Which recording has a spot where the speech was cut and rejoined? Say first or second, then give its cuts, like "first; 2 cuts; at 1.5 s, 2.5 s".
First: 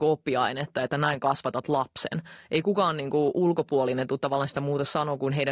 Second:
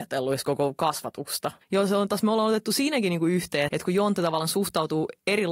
second; 2 cuts; at 1.6 s, 3.7 s